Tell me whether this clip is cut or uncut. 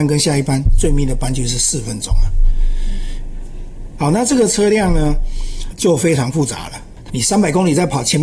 cut